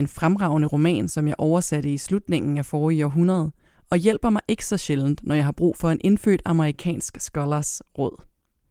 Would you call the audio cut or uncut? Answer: uncut